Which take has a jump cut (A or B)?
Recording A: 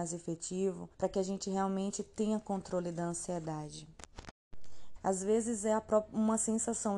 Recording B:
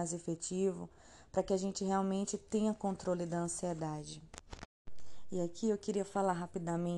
A